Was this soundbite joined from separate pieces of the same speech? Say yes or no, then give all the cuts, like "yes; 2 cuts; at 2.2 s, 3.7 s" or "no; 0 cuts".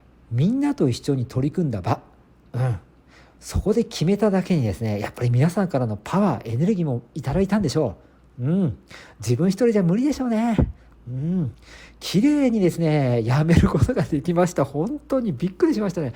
no; 0 cuts